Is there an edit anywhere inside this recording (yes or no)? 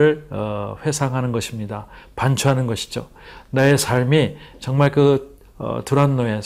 no